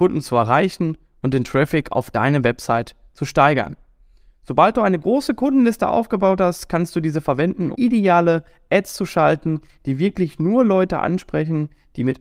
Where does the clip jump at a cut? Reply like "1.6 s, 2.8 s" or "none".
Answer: 7.7 s